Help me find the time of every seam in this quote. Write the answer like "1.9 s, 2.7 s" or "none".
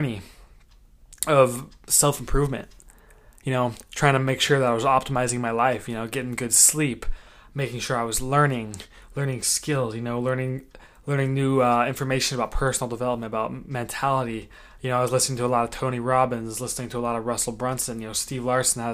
none